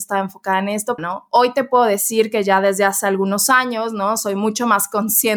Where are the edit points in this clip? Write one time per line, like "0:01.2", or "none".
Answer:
0:01.0